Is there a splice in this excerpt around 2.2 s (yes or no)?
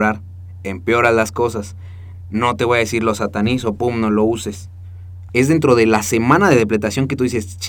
yes